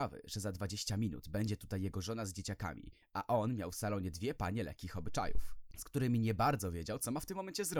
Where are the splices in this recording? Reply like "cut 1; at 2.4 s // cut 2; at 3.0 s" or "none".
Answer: none